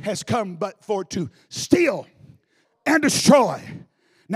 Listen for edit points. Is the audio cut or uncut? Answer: cut